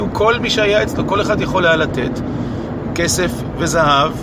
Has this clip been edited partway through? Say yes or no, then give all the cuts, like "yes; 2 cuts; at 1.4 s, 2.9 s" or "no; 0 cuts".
no; 0 cuts